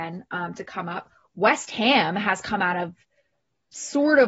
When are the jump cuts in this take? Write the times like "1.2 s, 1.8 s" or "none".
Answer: none